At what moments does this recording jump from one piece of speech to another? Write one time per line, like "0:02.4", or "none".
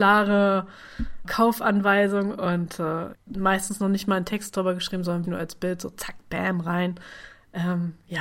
0:01.2
0:03.1
0:05.2